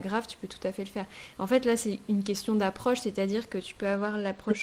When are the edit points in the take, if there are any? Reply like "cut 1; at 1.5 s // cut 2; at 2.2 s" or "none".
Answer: none